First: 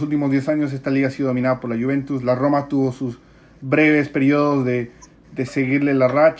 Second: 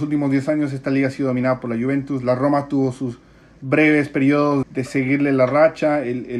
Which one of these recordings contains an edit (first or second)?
second